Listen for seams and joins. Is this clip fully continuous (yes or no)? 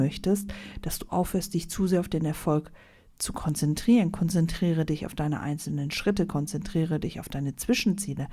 yes